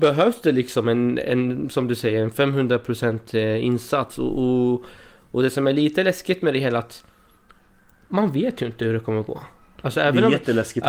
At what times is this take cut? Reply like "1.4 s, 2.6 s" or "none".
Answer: none